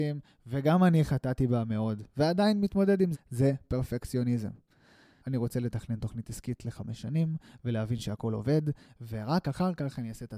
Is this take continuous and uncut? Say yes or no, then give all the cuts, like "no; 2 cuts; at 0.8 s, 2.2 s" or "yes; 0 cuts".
no; 2 cuts; at 3.1 s, 5.2 s